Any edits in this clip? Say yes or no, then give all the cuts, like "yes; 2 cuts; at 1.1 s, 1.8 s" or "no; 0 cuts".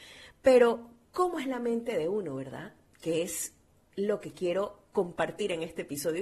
no; 0 cuts